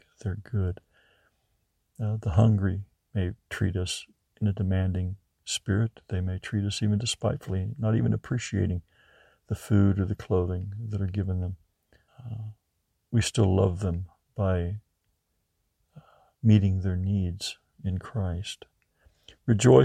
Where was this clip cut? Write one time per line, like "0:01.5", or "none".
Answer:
0:12.1

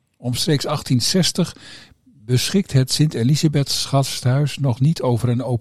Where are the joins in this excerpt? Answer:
none

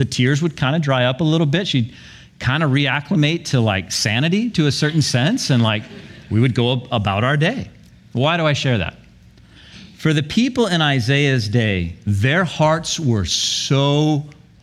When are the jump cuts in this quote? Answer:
none

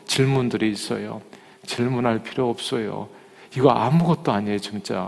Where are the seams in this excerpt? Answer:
none

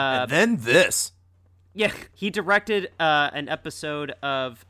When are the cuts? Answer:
0:02.1

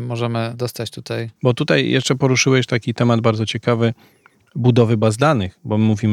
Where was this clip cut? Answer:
0:01.4

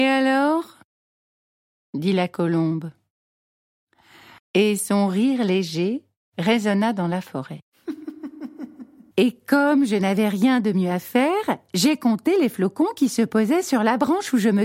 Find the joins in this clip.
0:04.4
0:09.1

